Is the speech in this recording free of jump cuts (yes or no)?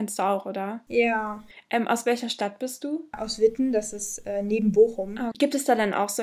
no